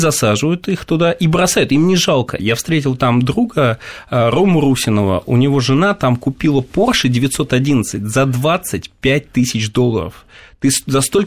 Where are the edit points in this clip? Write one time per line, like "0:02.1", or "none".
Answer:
0:02.4